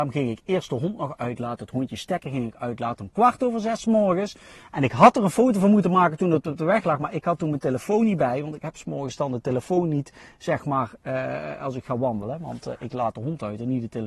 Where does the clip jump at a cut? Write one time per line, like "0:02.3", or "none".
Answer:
none